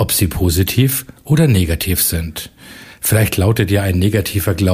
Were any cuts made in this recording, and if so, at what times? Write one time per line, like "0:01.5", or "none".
none